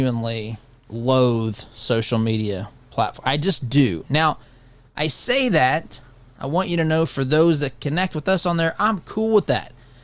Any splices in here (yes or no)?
no